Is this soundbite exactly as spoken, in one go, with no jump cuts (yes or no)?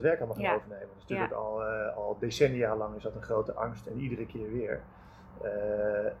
yes